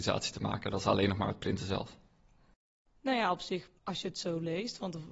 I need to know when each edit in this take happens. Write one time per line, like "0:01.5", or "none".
0:03.8